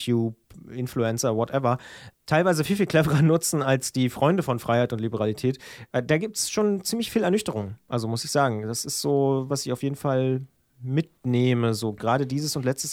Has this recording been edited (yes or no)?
yes